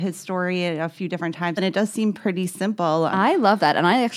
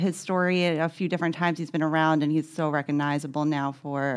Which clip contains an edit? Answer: first; 2 cuts; at 1.6 s, 3.1 s

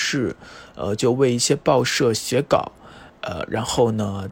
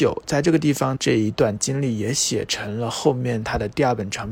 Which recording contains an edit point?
second; 1 cut; at 1.0 s

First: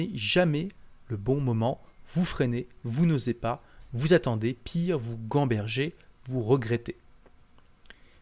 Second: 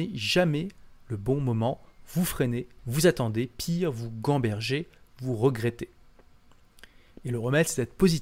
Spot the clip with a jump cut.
second; 2 cuts; at 2.8 s, 7.2 s

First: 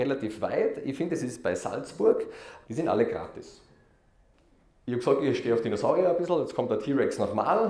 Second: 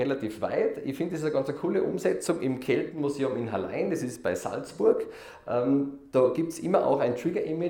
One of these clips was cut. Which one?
first; 2 cuts; at 1.1 s, 2.6 s

